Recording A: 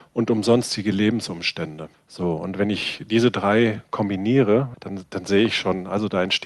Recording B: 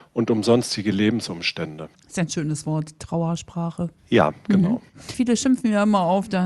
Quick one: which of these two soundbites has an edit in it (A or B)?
B